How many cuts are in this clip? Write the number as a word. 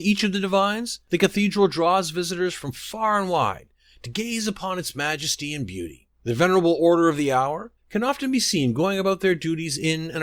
one